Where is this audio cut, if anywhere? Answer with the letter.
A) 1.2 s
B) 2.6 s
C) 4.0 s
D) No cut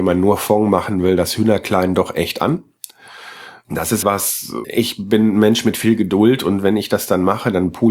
C